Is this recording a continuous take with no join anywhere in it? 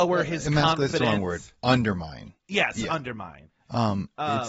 yes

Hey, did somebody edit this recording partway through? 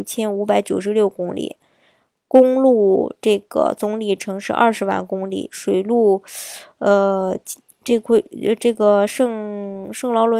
no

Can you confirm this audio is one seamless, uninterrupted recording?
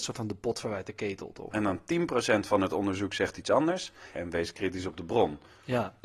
no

